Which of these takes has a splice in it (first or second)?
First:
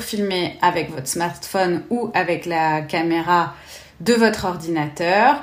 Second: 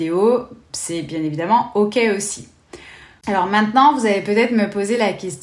second